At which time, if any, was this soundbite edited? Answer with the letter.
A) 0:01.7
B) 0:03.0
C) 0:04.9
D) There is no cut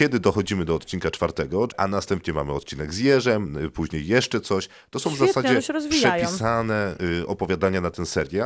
A